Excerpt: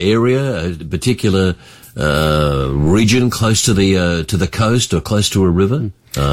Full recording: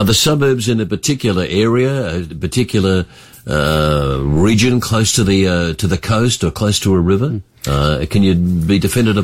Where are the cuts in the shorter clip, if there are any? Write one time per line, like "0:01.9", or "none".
none